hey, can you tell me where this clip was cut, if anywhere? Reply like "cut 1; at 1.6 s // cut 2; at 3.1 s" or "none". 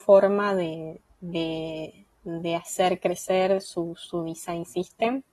none